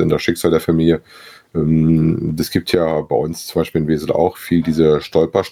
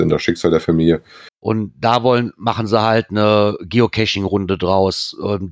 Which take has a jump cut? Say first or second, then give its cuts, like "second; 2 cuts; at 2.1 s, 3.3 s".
second; 1 cut; at 1.3 s